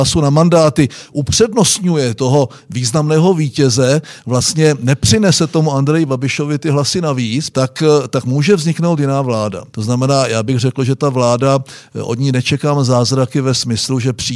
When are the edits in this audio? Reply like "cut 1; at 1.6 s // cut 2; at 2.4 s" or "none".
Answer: cut 1; at 7.5 s // cut 2; at 9.7 s